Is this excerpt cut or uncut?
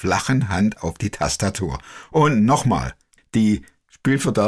cut